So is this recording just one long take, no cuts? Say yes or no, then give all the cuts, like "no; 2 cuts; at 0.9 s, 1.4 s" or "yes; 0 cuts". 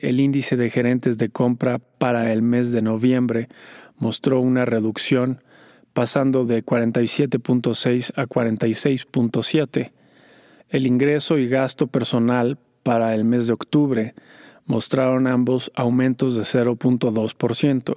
no; 1 cut; at 10.6 s